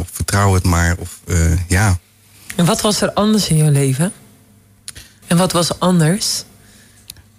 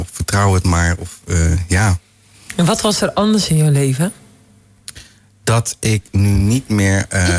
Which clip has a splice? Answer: first; 1 cut; at 5.2 s

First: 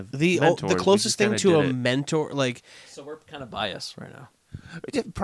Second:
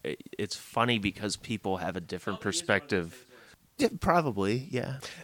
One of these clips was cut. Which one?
second; 1 cut; at 3.8 s

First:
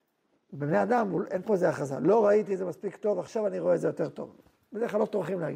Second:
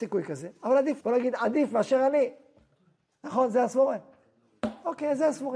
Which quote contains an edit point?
second; 1 cut; at 1.0 s

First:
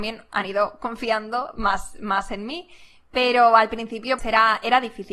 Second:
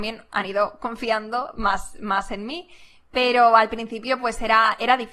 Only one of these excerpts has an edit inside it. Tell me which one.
first; 1 cut; at 4.2 s

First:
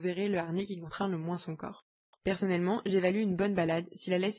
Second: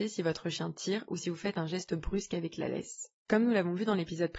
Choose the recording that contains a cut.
first; 1 cut; at 2.2 s

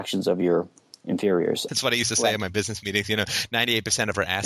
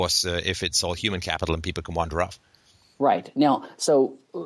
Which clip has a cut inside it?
first; 1 cut; at 1.7 s

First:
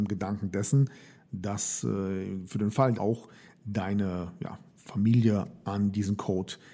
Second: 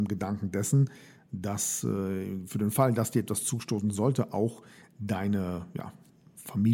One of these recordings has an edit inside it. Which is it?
first; 2 cuts; at 2.9 s, 4.7 s

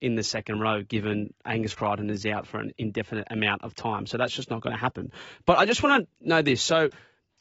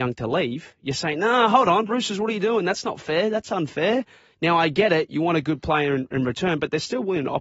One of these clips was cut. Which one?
second; 1 cut; at 1.9 s

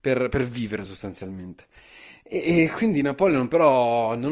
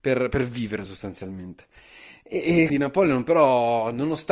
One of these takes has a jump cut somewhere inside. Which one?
second; 1 cut; at 2.7 s

